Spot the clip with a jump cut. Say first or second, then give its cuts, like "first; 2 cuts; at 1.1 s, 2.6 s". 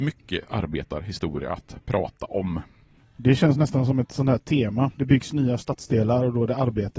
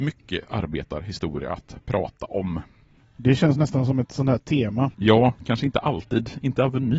second; 1 cut; at 4.9 s